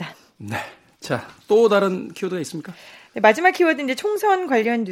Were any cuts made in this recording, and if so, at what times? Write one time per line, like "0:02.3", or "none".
none